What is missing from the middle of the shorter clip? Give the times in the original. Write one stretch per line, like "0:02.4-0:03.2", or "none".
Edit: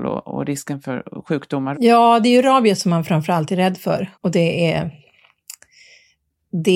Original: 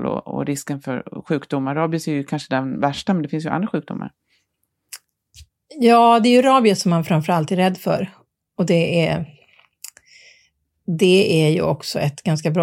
0:01.7-0:05.7
0:08.1-0:08.5